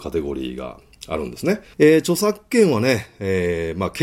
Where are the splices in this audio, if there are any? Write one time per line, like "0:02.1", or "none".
0:01.7